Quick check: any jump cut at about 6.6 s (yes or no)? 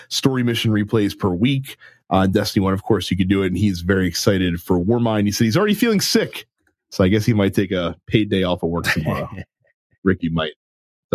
no